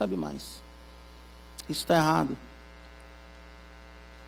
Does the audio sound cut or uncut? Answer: cut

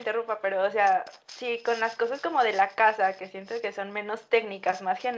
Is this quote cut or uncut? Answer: uncut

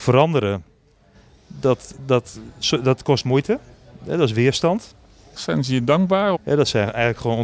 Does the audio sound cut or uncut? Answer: cut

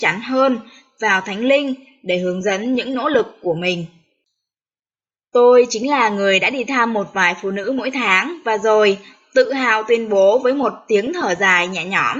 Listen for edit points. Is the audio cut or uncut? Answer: uncut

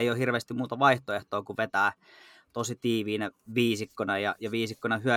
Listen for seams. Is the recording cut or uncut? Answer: uncut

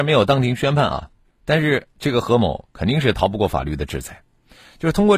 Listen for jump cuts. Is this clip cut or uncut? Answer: uncut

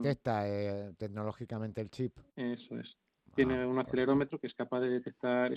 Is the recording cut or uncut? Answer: cut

